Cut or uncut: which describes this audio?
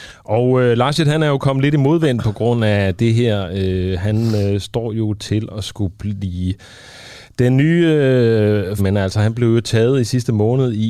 cut